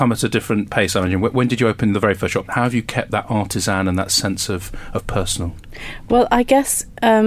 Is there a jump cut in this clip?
yes; 1 cut; at 2.5 s

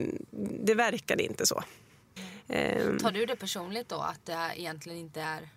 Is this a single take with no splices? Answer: no; 1 cut; at 2.2 s

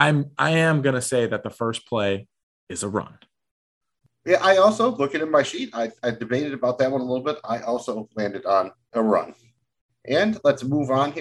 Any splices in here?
no; 0 cuts

